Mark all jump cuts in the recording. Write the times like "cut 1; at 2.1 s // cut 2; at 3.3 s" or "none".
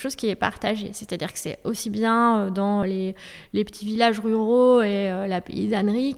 cut 1; at 2.8 s